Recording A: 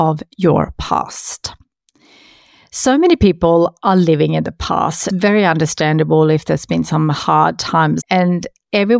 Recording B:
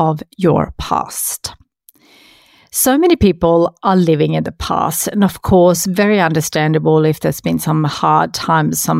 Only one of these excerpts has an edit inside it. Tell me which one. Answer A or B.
A